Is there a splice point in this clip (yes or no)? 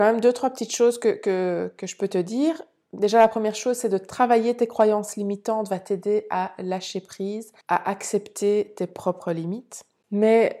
yes